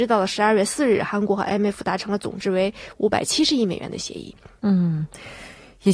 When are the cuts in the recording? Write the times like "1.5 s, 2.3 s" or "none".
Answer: none